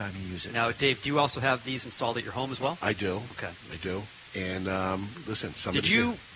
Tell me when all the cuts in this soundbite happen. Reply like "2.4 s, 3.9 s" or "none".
none